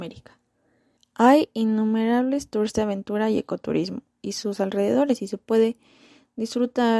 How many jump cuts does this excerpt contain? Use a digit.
1